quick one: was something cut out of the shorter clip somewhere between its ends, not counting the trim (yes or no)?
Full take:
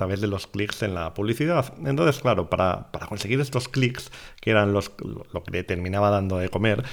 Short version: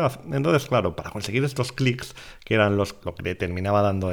yes